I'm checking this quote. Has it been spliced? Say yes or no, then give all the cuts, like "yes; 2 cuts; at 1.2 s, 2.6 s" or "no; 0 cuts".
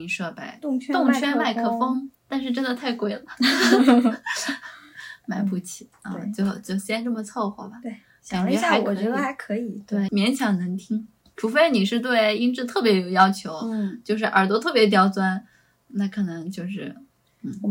yes; 1 cut; at 10.1 s